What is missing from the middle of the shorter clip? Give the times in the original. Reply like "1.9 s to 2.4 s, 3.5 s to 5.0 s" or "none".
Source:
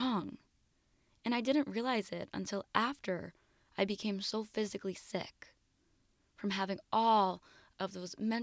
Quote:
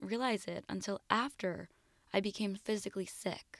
4.2 s to 4.4 s